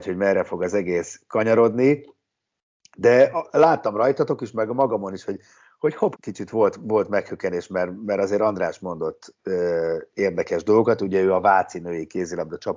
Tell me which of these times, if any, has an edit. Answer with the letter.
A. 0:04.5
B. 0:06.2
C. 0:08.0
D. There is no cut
B